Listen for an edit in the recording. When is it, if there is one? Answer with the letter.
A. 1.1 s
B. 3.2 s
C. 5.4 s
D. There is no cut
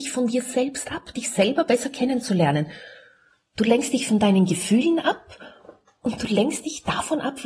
A